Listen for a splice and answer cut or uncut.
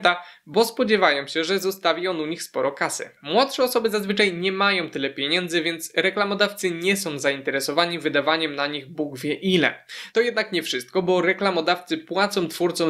cut